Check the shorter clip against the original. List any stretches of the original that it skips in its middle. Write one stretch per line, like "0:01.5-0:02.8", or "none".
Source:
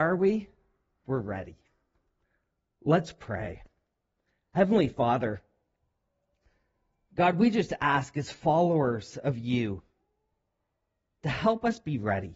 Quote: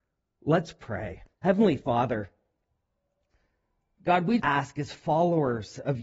0:03.7-0:04.5
0:07.5-0:07.8